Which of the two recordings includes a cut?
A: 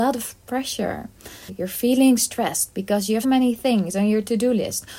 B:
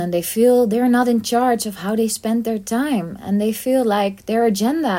A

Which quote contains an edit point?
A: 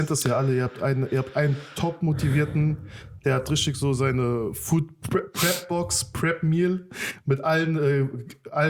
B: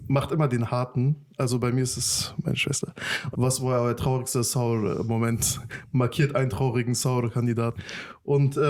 B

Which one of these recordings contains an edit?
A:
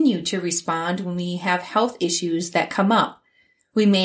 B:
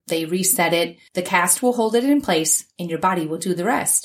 B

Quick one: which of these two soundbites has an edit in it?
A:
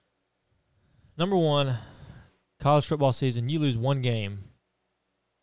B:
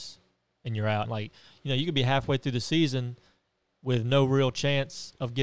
B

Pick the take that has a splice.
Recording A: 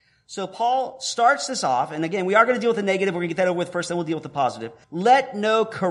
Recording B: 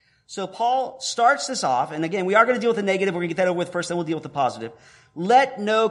A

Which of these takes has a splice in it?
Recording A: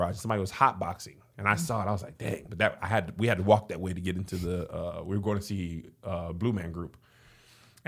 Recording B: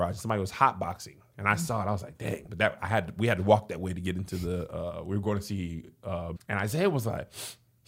B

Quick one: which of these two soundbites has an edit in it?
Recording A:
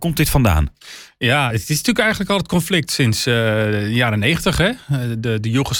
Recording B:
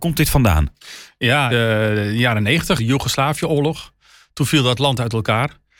B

